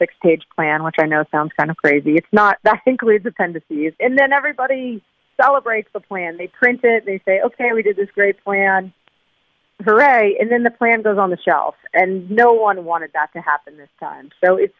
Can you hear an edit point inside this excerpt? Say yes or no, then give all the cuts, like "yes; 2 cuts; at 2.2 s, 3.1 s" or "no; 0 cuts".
yes; 1 cut; at 4.0 s